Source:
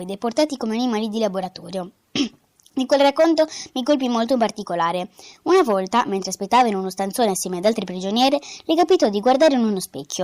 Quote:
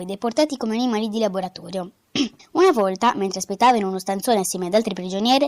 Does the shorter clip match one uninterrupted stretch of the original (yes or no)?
no